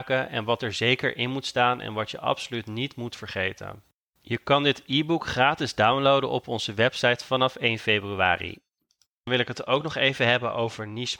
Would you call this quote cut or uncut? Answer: uncut